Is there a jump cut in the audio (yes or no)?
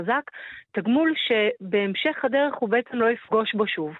no